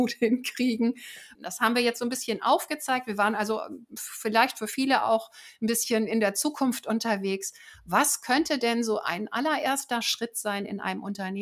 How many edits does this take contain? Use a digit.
1